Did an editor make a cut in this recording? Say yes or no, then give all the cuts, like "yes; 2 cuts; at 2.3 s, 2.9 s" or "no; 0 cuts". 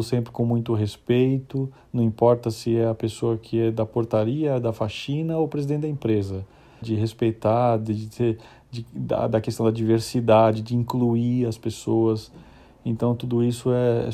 yes; 1 cut; at 6.8 s